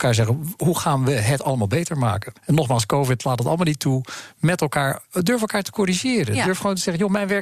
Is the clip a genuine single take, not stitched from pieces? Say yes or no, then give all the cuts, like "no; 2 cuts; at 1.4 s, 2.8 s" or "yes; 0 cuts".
no; 1 cut; at 2.4 s